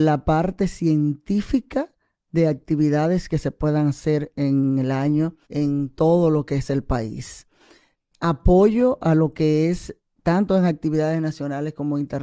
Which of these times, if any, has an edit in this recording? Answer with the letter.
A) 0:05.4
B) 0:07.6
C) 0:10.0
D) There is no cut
A